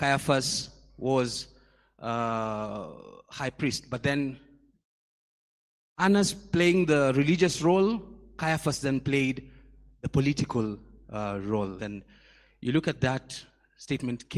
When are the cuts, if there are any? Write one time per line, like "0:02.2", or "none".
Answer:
0:11.8